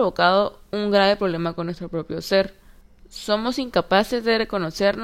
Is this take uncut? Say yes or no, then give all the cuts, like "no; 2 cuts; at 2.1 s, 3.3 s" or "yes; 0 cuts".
yes; 0 cuts